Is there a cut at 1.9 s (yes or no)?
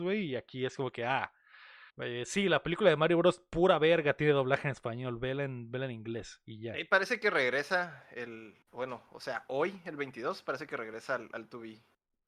yes